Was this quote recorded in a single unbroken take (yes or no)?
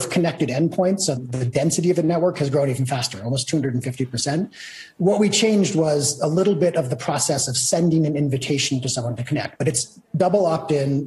no